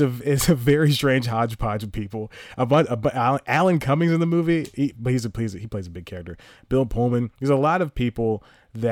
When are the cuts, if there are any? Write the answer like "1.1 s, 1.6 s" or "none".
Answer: none